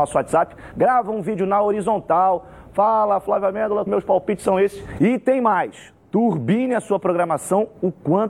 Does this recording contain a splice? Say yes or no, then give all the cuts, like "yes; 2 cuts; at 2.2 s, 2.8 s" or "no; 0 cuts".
yes; 2 cuts; at 3.9 s, 5.0 s